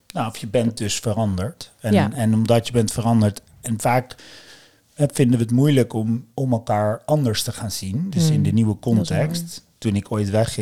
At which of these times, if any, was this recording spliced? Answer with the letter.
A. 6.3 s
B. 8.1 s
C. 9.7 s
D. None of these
A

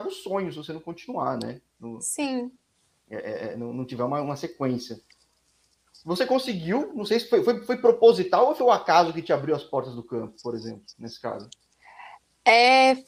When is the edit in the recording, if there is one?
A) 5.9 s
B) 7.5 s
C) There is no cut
C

